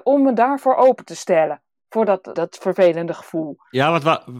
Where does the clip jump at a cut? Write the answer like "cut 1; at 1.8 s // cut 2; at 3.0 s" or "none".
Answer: cut 1; at 2.4 s

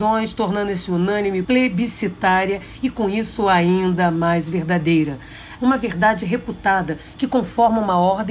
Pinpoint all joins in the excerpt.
cut 1; at 1.4 s // cut 2; at 5.6 s

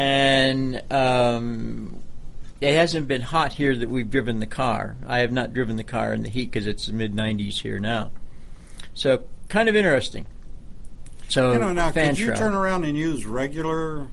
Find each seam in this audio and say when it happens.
none

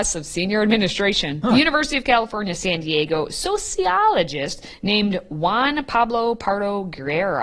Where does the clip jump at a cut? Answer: cut 1; at 1.4 s

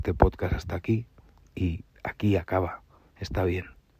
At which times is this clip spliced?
cut 1; at 3.0 s

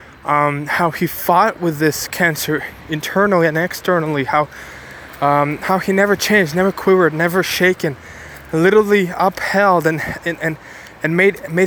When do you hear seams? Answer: none

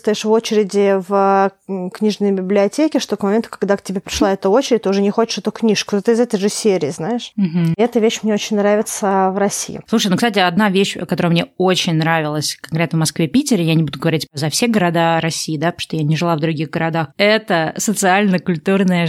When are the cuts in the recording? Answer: cut 1; at 7.7 s

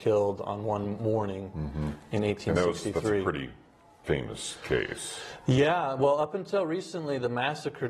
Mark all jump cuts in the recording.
none

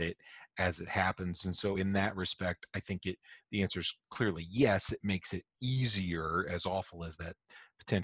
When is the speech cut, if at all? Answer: none

